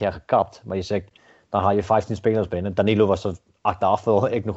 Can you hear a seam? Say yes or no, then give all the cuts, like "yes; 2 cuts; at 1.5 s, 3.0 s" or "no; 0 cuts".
no; 0 cuts